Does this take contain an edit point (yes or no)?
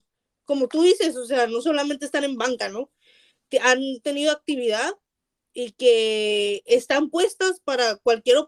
no